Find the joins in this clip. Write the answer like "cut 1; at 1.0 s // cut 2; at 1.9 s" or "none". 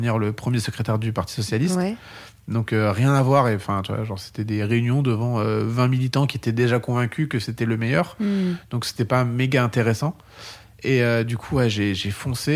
none

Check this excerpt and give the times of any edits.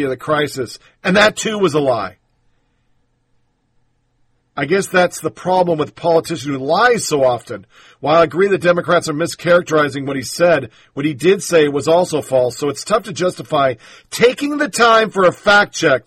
none

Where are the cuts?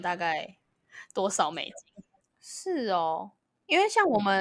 cut 1; at 2.2 s

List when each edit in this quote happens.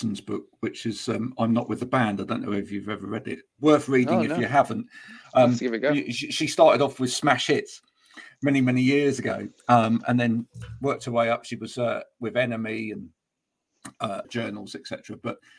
cut 1; at 14.2 s

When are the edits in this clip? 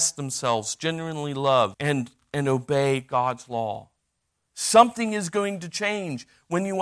cut 1; at 1.7 s // cut 2; at 4.5 s

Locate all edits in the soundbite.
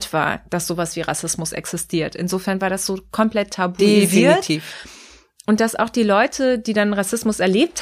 none

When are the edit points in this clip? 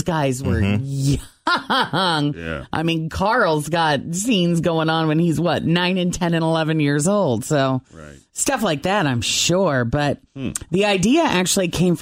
none

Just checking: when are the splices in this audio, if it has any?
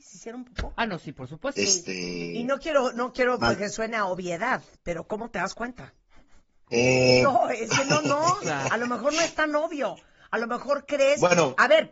cut 1; at 1.6 s // cut 2; at 6.6 s

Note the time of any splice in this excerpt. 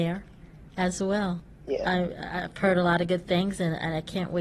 none

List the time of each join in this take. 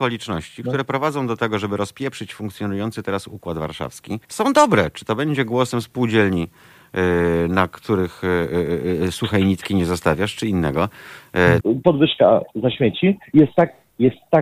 cut 1; at 4.2 s // cut 2; at 11.6 s

